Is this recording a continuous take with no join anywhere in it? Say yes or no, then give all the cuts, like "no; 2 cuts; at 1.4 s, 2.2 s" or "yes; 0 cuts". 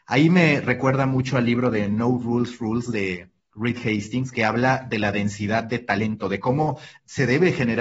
no; 1 cut; at 4.3 s